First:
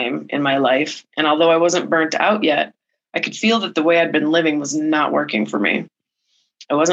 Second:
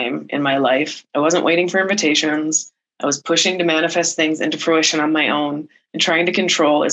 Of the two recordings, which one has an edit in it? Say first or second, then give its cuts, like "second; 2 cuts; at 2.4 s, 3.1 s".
second; 1 cut; at 1.1 s